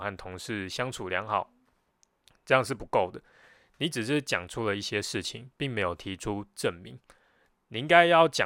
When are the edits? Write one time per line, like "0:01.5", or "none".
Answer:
none